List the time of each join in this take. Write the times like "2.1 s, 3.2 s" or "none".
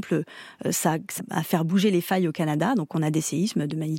1.2 s

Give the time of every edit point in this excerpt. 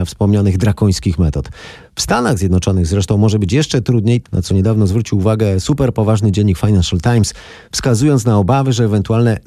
4.2 s

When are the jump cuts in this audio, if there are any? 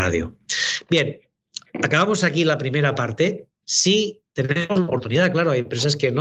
3.6 s

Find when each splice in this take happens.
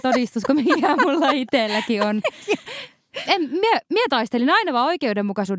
3.3 s

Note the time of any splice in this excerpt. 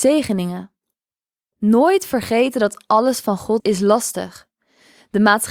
3.6 s

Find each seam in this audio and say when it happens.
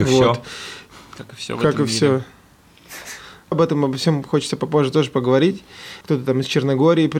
3.5 s, 6.0 s

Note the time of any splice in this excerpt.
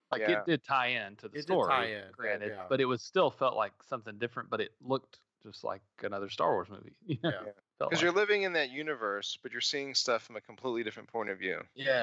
7.6 s

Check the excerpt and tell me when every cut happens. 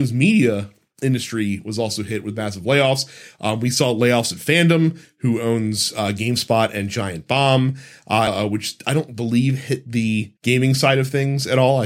8.3 s, 10.4 s

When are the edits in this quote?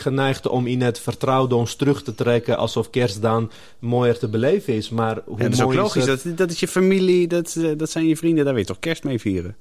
none

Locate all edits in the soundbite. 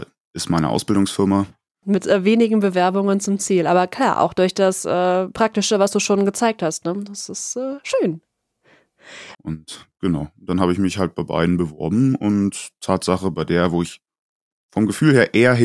1.8 s, 9.3 s

